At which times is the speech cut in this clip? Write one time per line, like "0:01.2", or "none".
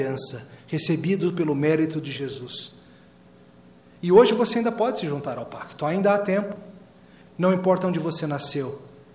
0:07.2